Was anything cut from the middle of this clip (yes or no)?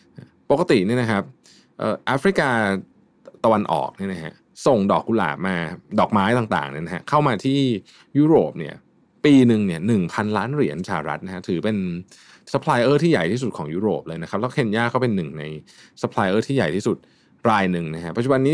no